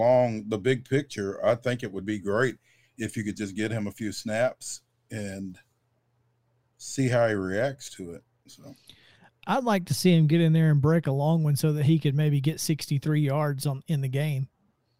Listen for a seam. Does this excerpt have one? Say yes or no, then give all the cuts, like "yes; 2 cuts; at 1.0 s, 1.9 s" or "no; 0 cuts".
no; 0 cuts